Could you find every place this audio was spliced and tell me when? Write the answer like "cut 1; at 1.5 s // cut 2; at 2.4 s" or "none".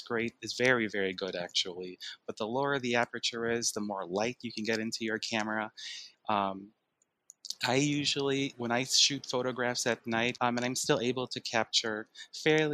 cut 1; at 2.2 s // cut 2; at 6.1 s // cut 3; at 10.4 s